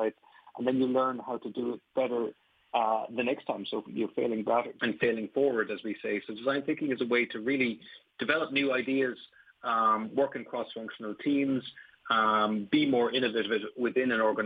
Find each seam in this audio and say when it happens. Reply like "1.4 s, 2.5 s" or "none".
4.8 s

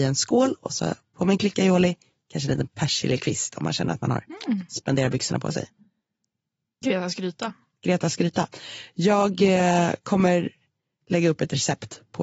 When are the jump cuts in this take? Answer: 6.8 s

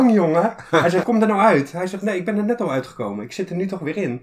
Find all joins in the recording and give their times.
1.0 s

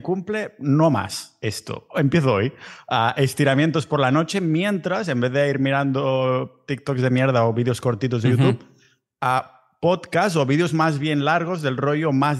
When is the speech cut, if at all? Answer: none

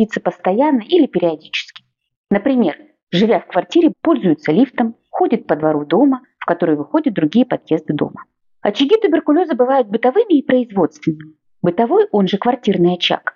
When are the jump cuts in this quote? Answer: 3.9 s

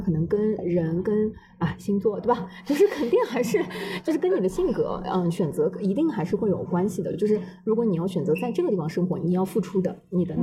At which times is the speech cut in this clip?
none

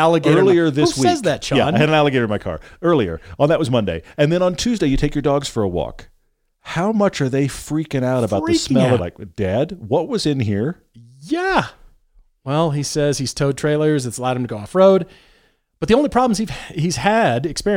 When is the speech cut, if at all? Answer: 9.0 s

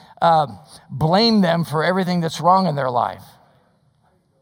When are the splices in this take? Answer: none

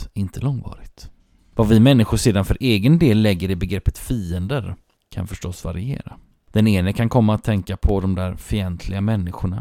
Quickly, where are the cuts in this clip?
none

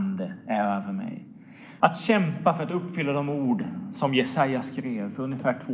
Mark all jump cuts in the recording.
1.8 s

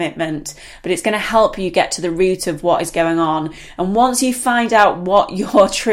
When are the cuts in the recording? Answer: none

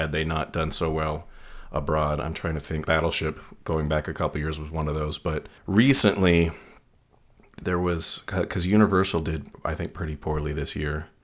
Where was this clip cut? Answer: 2.8 s, 5.6 s

